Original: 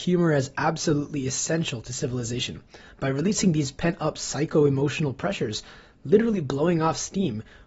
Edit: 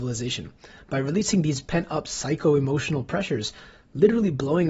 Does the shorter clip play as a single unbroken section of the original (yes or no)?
yes